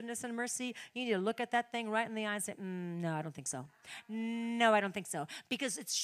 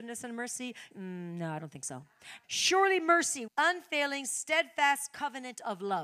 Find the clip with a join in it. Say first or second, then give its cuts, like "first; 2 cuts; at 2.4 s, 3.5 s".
second; 3 cuts; at 0.9 s, 2.4 s, 3.5 s